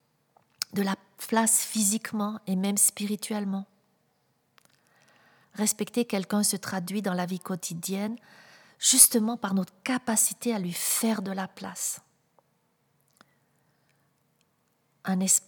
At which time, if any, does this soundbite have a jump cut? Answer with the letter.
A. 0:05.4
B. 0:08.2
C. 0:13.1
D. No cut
A